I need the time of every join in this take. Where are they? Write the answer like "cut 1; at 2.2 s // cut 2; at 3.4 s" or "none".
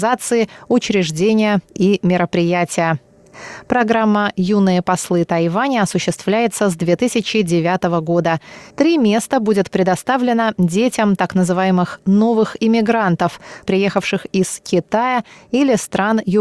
cut 1; at 8.7 s // cut 2; at 13.7 s